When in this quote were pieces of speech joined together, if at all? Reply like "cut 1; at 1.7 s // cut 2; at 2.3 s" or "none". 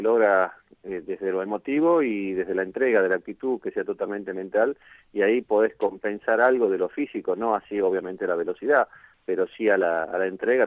none